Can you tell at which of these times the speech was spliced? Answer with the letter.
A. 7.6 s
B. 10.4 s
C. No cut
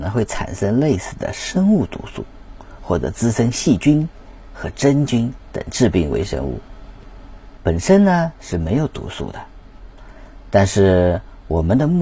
A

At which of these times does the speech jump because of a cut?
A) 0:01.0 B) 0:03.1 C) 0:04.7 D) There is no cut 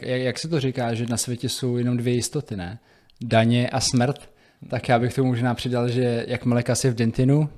D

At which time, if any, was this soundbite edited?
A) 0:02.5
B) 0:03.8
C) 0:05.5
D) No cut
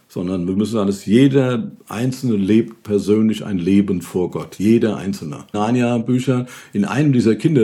C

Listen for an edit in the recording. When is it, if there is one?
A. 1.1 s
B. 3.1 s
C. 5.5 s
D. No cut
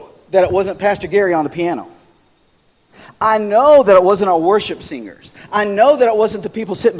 D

